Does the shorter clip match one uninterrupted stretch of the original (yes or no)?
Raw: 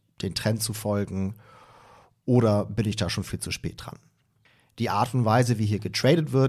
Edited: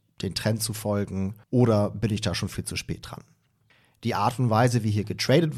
no